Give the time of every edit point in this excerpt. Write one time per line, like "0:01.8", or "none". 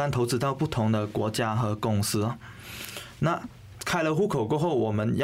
none